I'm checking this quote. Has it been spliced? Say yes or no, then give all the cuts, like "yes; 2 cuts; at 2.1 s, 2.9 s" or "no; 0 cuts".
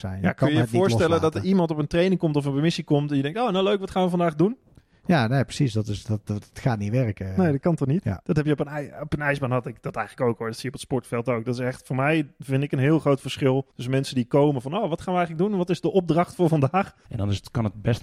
yes; 2 cuts; at 13.7 s, 17.1 s